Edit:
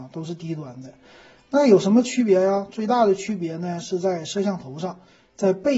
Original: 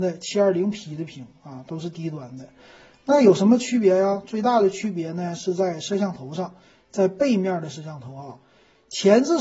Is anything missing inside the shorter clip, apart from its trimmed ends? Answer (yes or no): no